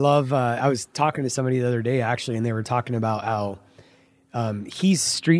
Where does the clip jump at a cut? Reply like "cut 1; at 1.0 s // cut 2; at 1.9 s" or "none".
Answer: none